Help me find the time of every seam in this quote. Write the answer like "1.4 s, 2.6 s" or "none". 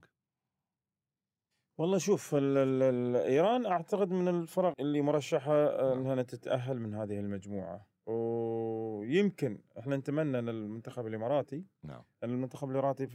4.7 s, 8.0 s